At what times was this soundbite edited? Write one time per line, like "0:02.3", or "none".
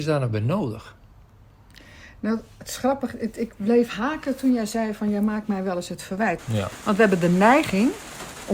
0:06.4